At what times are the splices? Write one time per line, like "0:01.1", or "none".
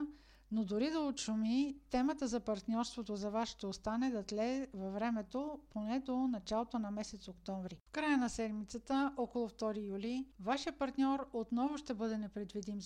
0:07.9